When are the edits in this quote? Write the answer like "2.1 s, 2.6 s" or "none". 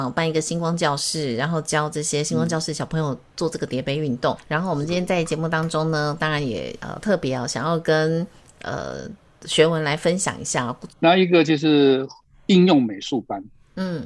4.4 s, 10.9 s